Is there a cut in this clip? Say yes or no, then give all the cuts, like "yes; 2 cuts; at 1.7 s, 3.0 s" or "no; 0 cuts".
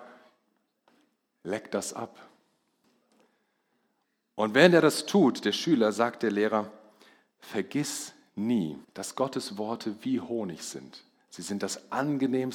yes; 1 cut; at 8.8 s